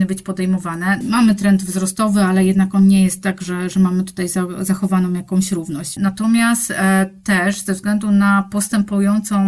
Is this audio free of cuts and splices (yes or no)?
no